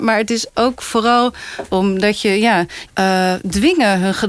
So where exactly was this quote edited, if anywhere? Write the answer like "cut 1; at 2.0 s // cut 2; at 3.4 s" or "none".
cut 1; at 1.7 s // cut 2; at 2.9 s